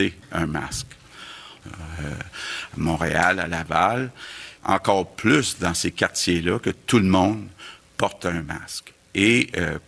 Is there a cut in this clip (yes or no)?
yes